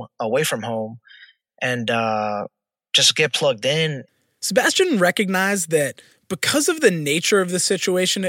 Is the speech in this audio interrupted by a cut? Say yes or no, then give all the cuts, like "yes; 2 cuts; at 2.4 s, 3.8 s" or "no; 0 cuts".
no; 0 cuts